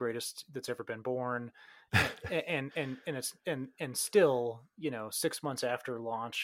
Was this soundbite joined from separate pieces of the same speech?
no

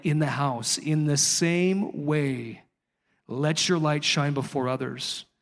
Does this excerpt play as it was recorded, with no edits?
yes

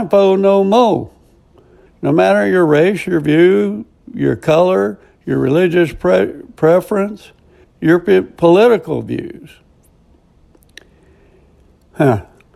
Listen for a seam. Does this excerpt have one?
yes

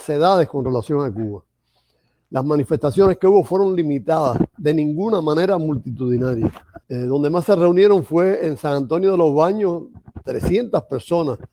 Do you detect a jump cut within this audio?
yes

